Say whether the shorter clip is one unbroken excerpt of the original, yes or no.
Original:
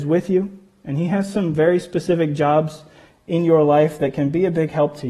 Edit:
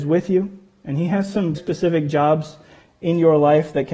no